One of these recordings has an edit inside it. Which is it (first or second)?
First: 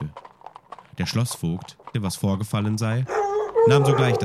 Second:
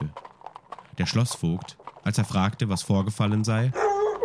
first